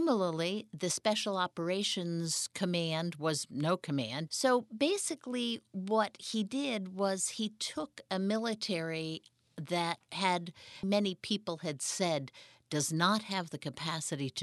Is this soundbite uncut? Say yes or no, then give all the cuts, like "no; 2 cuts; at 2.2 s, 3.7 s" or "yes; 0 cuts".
no; 2 cuts; at 4.3 s, 10.8 s